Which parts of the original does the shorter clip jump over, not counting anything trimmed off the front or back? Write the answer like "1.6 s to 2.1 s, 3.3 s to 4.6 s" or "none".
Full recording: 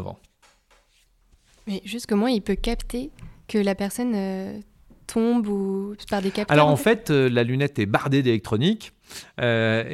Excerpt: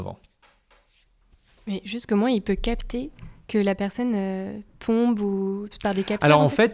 4.7 s to 5.0 s

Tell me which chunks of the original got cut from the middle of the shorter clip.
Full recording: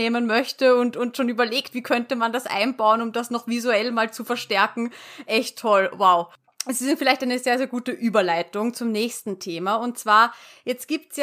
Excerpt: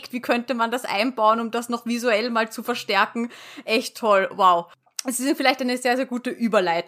none

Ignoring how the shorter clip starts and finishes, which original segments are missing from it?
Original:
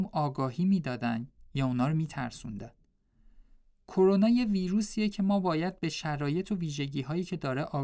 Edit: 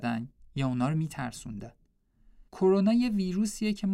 3.5 s to 3.8 s

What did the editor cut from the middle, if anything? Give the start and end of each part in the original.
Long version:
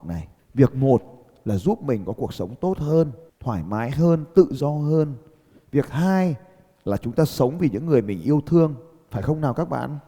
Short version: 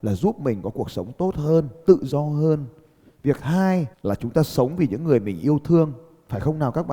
3.3 s to 4.3 s, 6.4 s to 6.7 s

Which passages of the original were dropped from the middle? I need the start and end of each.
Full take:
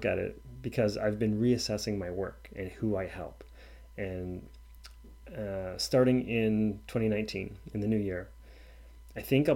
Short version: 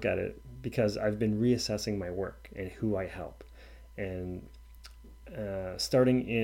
none

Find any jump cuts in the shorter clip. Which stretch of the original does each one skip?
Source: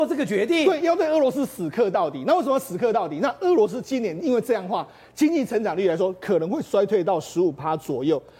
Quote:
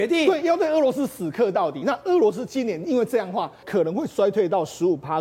2.2 s to 3.2 s, 5.0 s to 6.2 s

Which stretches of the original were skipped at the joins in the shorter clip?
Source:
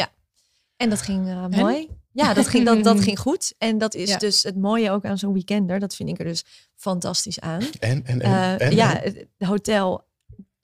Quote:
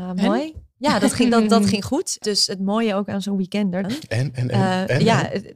3.6 s to 4.2 s, 5.8 s to 7.6 s

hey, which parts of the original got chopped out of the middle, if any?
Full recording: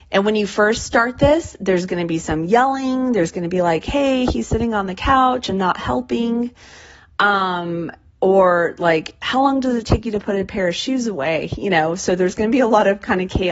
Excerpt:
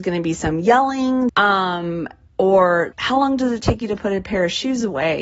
3.1 s to 7.1 s, 8.8 s to 9.2 s

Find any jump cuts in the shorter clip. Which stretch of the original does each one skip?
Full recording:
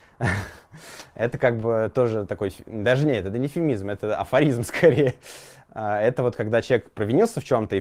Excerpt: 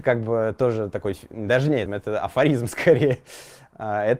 3.2 s to 3.8 s

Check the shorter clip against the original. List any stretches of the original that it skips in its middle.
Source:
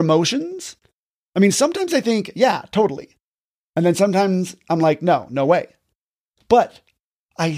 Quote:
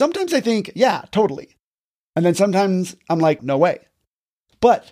5.0 s to 5.3 s

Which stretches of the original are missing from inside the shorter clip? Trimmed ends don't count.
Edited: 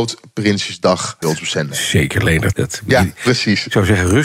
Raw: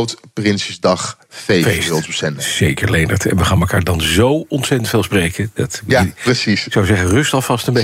1.2 s to 1.9 s, 3.2 s to 5.5 s

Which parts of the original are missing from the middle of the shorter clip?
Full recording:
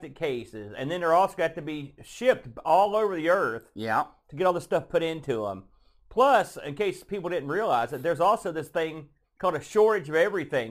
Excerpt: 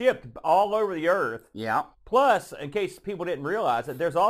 4.1 s to 6.0 s

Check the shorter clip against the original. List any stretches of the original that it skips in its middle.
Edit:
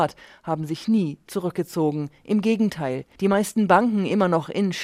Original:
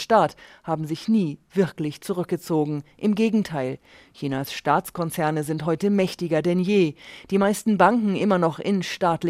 1.5 s to 2.0 s, 3.9 s to 7.2 s

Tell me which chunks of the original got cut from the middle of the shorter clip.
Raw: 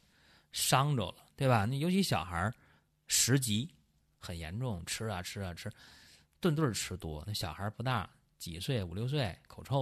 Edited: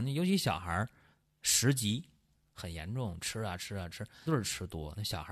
5.9 s to 6.6 s

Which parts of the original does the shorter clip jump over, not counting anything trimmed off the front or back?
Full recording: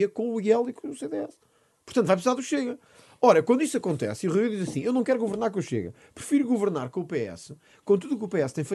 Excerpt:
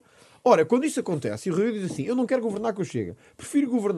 none

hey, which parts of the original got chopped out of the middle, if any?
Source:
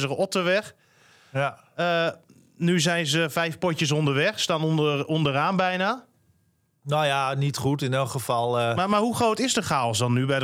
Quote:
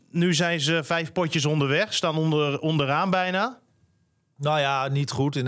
none

